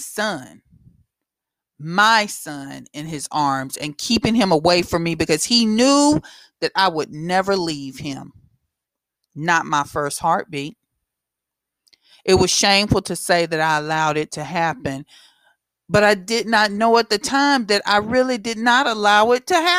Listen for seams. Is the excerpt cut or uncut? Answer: uncut